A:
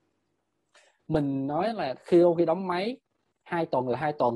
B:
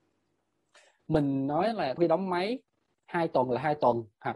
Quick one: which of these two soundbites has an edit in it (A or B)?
B